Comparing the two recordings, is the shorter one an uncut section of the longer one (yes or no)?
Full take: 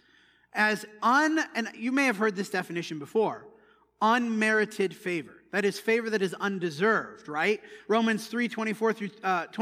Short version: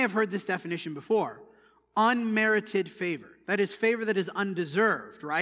yes